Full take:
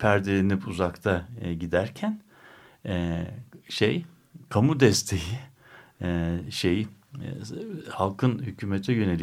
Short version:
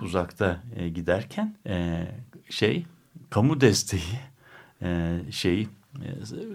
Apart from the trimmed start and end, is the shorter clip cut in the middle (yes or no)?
yes